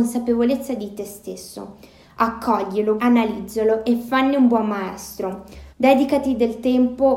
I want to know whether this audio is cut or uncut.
cut